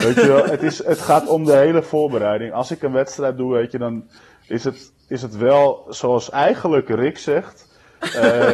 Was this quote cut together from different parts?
no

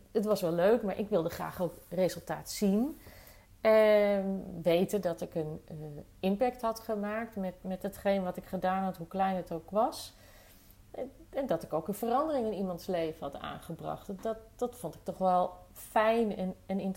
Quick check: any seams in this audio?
no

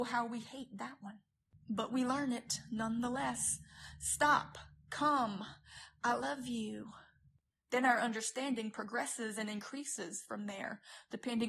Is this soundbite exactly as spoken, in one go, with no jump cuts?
yes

